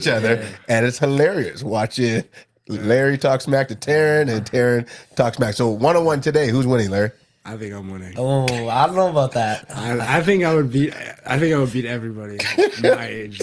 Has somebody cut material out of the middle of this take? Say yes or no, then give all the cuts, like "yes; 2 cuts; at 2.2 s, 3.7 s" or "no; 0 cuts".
no; 0 cuts